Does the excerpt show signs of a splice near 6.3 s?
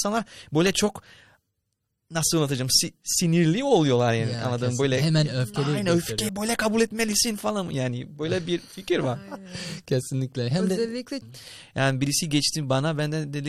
yes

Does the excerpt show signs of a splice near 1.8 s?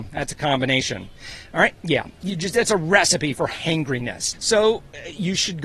yes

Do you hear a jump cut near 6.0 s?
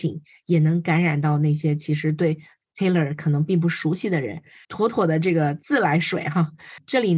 no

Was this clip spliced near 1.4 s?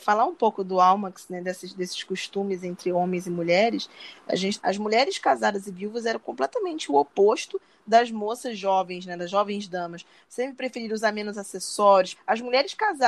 no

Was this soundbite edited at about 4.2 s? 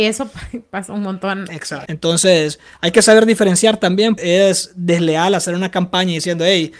yes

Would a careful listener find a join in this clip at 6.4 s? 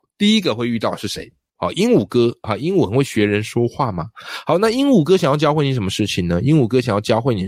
no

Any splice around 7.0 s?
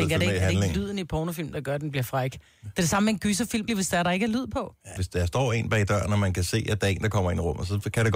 no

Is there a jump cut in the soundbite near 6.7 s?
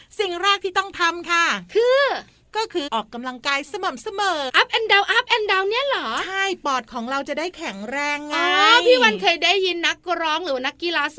no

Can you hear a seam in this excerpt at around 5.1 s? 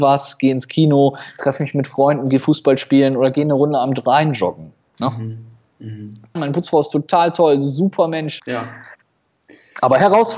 no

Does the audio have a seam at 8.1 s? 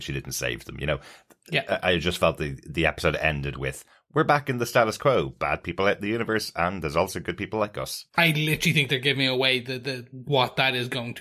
yes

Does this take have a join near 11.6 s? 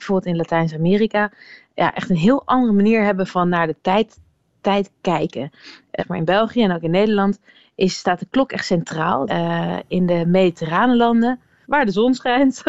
yes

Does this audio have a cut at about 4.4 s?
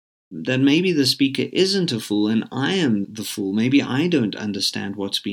no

